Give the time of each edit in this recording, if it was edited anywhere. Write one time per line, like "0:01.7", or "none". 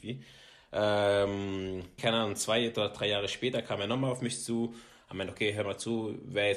0:02.0